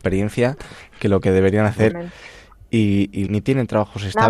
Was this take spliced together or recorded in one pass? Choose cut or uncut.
cut